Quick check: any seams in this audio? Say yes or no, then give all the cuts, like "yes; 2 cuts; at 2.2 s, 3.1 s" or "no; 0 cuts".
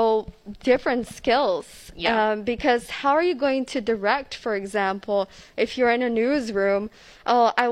no; 0 cuts